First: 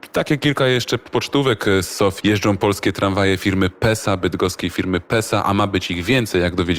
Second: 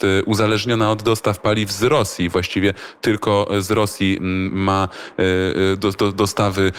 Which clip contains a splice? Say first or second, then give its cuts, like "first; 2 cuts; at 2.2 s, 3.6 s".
first; 1 cut; at 2.2 s